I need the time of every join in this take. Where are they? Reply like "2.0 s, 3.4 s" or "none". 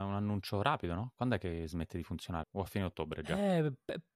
2.4 s